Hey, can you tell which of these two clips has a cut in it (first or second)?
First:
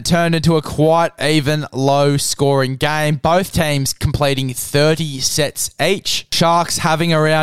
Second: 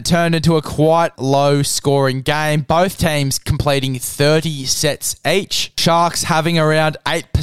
second